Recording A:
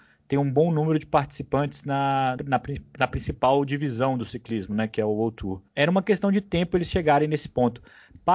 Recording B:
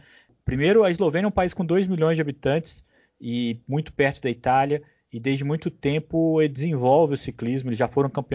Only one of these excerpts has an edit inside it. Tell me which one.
A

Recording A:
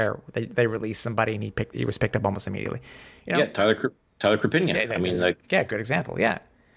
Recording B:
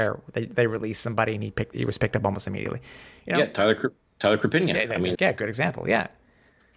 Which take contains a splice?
B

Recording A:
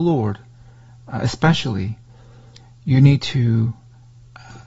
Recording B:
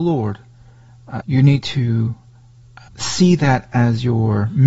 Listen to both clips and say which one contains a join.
B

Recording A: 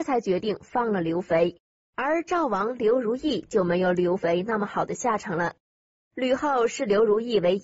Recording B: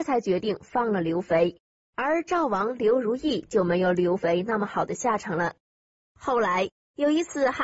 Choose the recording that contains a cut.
B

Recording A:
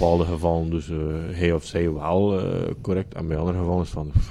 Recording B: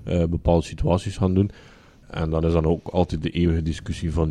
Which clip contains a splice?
B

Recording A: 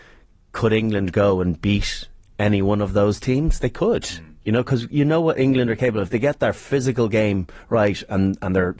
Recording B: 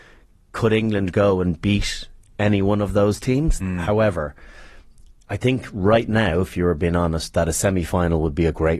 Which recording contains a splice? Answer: B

